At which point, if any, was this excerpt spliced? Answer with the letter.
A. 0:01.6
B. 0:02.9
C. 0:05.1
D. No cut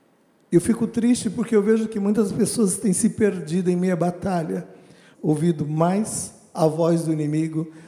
C